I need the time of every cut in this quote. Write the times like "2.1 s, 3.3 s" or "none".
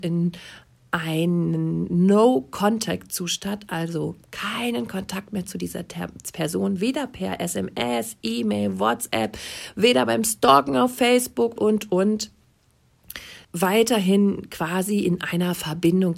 11.6 s, 13.4 s

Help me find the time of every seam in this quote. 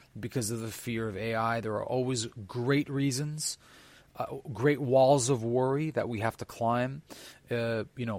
none

